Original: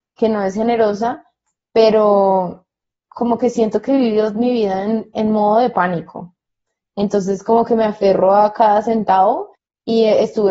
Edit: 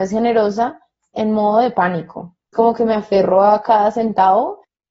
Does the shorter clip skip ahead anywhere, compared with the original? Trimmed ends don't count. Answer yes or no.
yes